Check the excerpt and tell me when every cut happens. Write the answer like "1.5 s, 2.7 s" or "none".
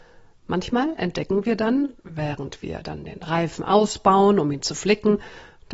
none